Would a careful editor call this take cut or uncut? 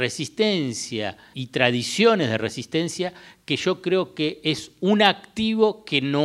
cut